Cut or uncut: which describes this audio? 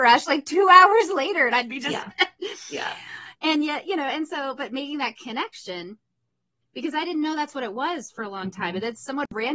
cut